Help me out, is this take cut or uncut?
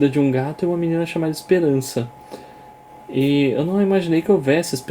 uncut